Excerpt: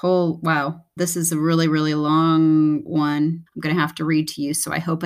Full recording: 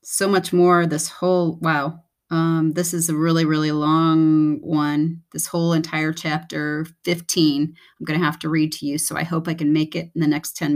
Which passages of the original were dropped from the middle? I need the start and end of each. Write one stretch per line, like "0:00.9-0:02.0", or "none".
0:02.2-0:02.7
0:05.2-0:07.9